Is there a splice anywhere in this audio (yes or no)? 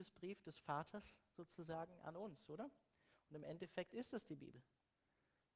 no